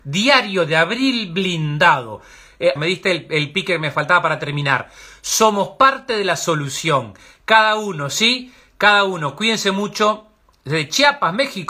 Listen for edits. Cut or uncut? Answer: cut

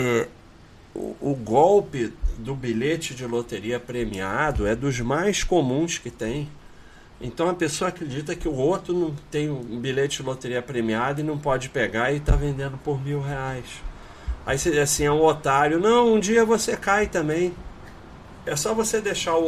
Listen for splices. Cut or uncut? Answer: uncut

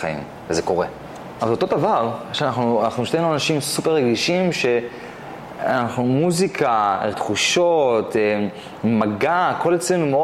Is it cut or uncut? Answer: cut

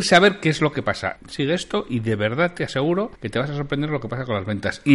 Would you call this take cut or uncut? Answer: cut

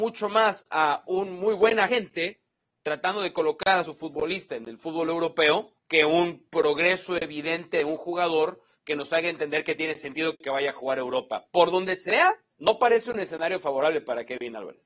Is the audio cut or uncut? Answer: cut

